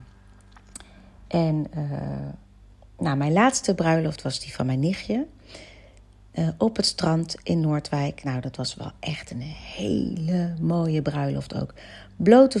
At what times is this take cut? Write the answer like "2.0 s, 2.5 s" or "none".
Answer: none